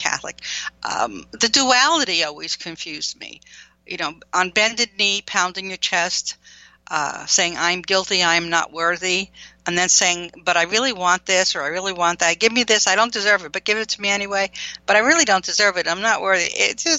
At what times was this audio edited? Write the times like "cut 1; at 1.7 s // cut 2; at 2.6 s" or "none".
none